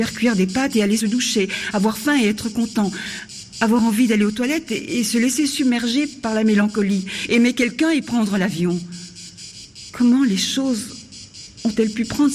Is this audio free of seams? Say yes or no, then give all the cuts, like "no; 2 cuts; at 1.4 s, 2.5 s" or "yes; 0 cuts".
yes; 0 cuts